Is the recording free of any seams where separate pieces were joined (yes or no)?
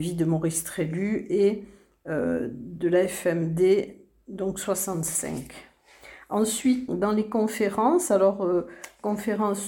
no